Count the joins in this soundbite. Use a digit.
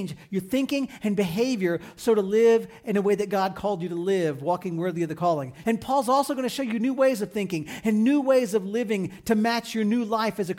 1